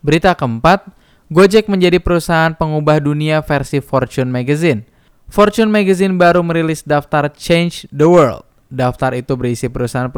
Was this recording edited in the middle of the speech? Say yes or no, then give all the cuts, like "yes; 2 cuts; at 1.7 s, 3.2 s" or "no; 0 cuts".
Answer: no; 0 cuts